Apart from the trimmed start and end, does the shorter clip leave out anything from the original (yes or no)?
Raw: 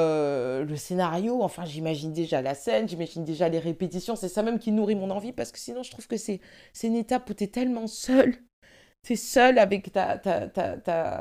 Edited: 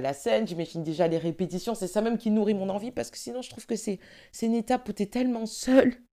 no